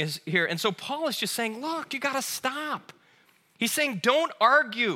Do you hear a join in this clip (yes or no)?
no